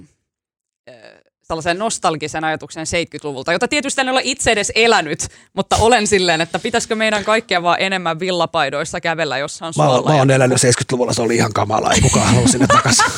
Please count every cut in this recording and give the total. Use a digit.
0